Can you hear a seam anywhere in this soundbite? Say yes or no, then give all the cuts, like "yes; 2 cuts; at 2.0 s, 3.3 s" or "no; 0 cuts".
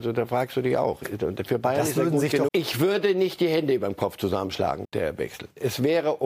yes; 2 cuts; at 2.5 s, 4.8 s